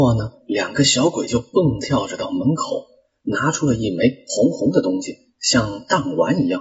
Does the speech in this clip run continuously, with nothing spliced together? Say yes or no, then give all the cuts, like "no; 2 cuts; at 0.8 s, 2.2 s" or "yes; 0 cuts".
yes; 0 cuts